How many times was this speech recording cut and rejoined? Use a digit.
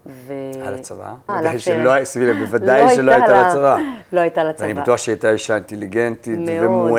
1